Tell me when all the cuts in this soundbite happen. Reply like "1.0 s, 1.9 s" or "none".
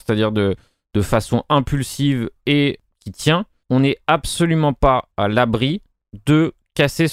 none